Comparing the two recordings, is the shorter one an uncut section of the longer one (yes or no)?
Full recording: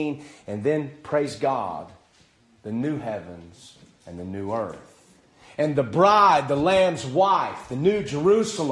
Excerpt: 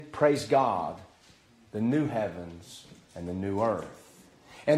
yes